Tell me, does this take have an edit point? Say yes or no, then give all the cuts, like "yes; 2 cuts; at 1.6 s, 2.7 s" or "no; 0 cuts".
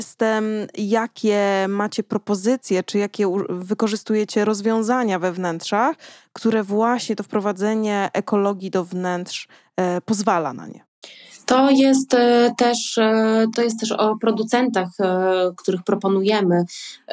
yes; 2 cuts; at 13.5 s, 15.6 s